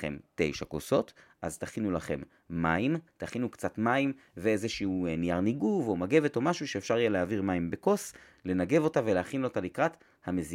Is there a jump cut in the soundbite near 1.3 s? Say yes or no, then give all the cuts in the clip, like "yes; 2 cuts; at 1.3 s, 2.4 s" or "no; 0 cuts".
no; 1 cut; at 3.1 s